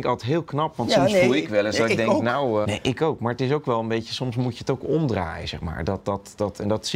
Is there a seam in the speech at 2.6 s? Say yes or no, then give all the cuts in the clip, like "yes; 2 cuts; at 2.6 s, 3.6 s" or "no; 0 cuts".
yes; 1 cut; at 2.6 s